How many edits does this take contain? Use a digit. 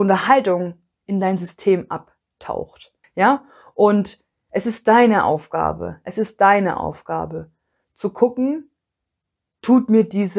1